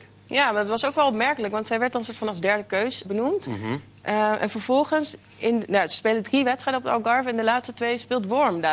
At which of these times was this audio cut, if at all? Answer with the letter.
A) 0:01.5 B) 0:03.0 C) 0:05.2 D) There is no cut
B